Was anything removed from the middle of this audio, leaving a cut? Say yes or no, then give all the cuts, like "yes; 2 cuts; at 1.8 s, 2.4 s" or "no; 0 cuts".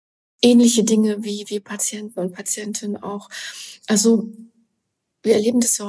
no; 0 cuts